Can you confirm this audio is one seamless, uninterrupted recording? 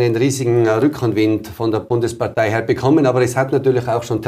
yes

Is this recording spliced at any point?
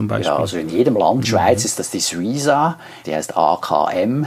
yes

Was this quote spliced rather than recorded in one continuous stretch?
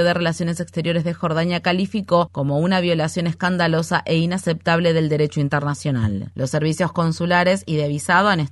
yes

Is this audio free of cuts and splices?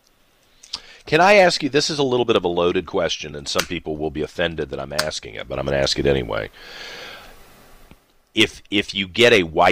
yes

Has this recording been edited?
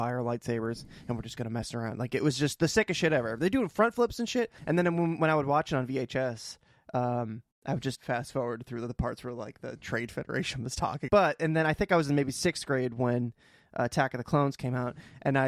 yes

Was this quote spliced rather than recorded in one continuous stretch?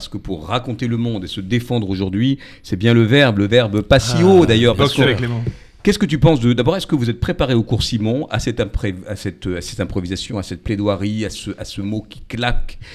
no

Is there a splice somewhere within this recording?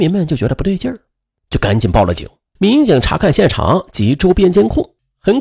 yes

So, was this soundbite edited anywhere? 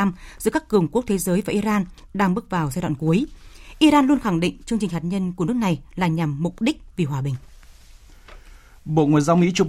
no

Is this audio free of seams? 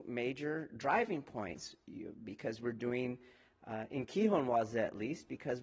yes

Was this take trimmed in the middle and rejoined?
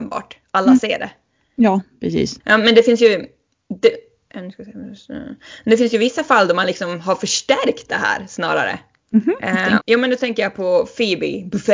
yes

